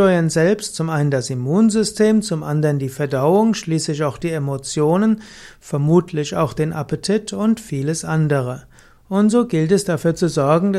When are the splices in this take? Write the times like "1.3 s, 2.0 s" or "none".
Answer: none